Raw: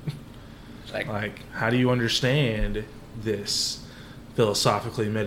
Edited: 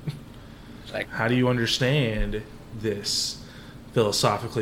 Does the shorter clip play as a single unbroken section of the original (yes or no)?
no